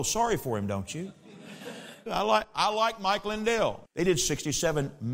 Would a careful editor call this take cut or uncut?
cut